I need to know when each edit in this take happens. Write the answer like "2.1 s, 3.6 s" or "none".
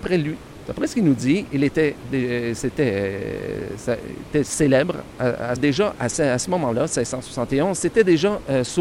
5.6 s